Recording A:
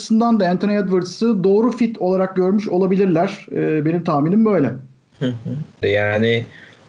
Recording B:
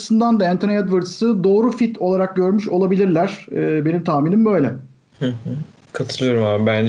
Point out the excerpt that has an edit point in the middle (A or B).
A